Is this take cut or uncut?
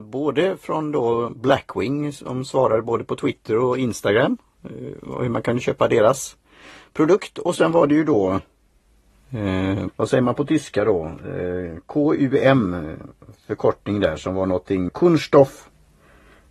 cut